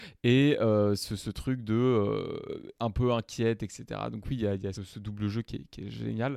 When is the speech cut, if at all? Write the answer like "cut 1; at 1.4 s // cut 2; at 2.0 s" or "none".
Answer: cut 1; at 4.7 s